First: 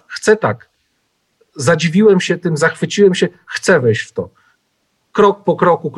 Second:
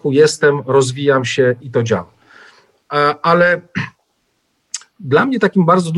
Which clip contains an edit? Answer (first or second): second